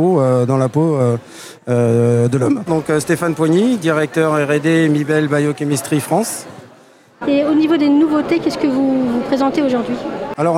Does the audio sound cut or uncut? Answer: cut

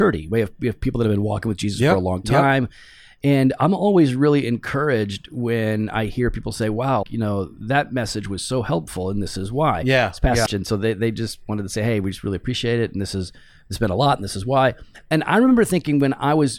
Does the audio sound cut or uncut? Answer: cut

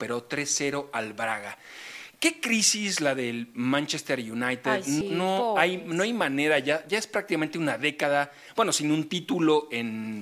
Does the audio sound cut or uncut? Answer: cut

